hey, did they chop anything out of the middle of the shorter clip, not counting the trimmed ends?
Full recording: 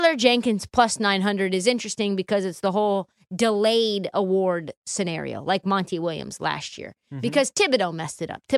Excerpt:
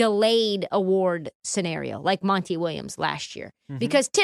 no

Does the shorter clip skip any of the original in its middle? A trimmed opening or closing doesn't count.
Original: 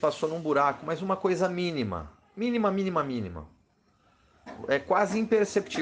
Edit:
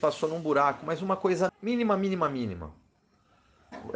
yes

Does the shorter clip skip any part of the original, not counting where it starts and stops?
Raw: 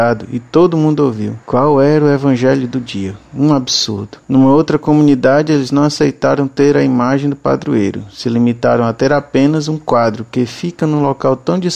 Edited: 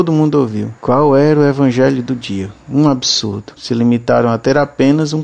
yes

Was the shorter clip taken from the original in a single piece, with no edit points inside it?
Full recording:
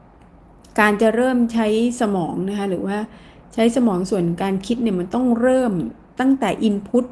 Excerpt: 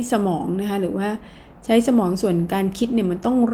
yes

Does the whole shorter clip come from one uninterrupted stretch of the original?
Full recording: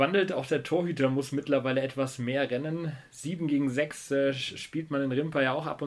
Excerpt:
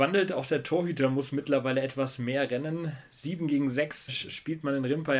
no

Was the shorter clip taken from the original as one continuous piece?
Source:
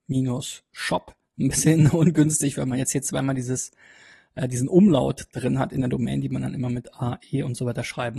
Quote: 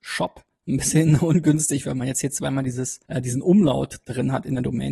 no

